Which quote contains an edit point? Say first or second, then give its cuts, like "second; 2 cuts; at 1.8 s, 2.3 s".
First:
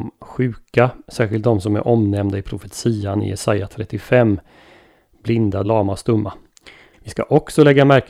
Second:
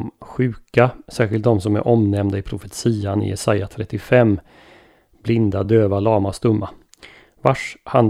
first; 2 cuts; at 5.6 s, 6.9 s